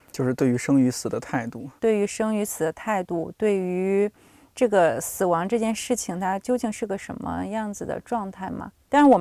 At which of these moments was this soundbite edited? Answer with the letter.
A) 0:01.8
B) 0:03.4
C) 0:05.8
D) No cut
A